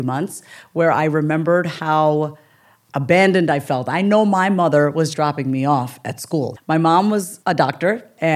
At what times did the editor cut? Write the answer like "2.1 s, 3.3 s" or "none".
5.1 s, 6.6 s